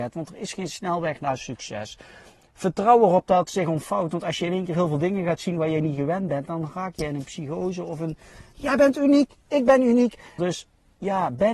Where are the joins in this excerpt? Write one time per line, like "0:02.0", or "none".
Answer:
0:08.5
0:10.4